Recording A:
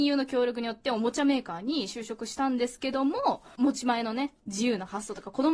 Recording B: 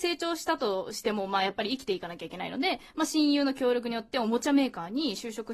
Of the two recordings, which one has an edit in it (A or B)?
A